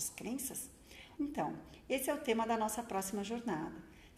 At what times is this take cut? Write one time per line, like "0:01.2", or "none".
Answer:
0:01.2